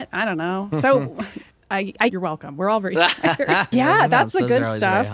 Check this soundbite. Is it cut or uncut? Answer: cut